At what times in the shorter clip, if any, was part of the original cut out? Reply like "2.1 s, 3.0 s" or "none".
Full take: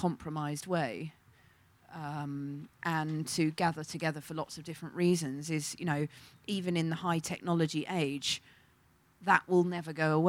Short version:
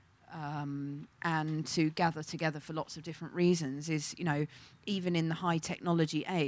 none